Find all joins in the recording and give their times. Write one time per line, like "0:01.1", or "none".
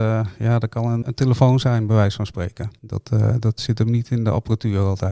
0:01.0